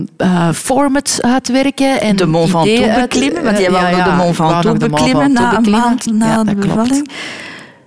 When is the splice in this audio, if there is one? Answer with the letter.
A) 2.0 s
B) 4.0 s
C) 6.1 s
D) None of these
C